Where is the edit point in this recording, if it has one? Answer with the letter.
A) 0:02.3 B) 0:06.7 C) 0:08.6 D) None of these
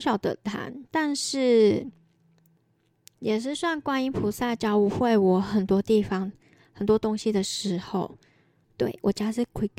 C